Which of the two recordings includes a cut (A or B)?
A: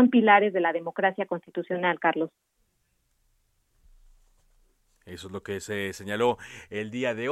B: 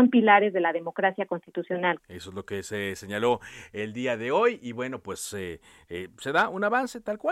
B